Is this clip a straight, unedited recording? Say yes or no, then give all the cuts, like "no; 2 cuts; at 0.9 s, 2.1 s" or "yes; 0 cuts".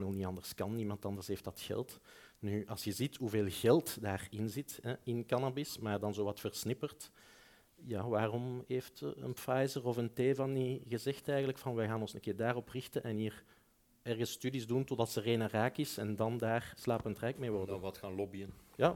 no; 1 cut; at 16.8 s